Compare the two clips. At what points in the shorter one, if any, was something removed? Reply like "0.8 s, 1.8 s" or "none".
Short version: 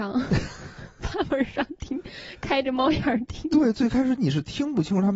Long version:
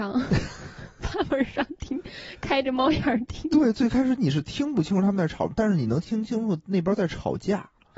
none